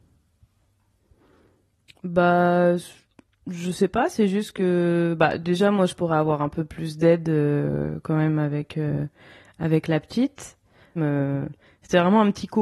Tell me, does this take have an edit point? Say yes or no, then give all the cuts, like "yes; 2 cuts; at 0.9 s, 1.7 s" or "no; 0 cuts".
yes; 1 cut; at 11.0 s